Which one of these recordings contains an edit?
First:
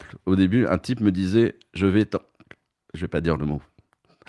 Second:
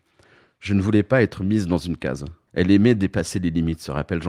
second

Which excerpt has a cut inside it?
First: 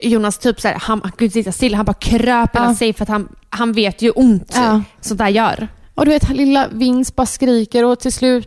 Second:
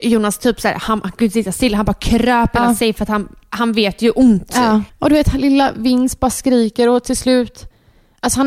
second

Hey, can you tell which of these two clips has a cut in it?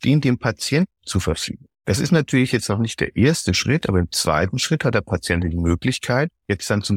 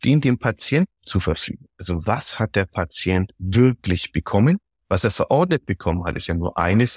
second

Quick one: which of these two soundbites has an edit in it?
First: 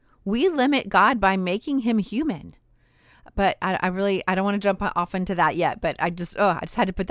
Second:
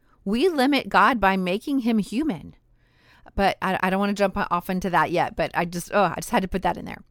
second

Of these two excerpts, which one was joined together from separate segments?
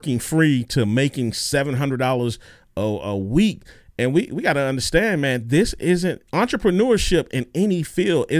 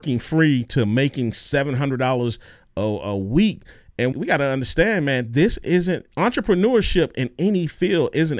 second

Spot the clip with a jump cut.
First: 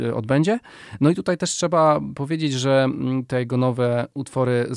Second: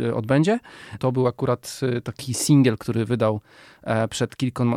second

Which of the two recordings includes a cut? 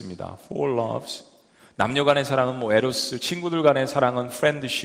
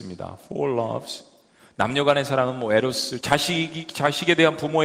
second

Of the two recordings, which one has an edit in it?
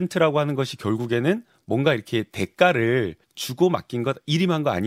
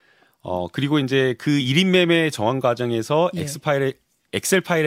first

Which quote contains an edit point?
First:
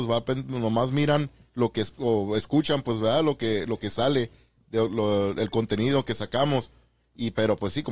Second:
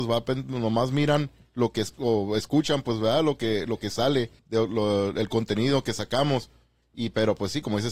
second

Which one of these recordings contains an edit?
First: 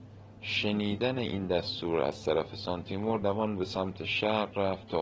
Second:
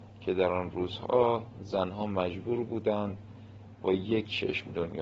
first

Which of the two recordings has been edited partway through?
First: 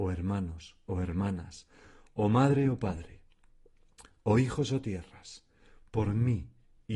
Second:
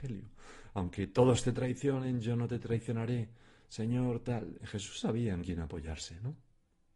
second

